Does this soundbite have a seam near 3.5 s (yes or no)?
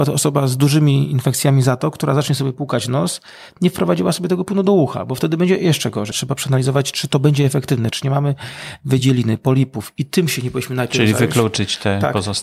no